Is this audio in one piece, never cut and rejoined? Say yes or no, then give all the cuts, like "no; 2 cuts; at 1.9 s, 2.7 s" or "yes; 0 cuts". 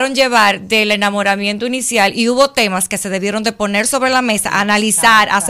yes; 0 cuts